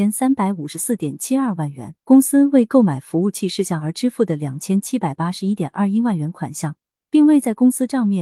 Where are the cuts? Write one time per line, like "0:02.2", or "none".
0:02.0